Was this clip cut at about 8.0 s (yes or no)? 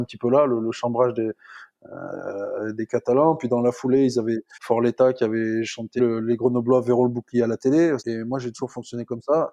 yes